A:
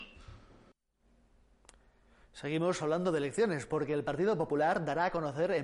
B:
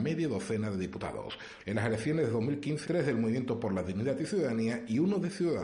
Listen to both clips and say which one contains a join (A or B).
B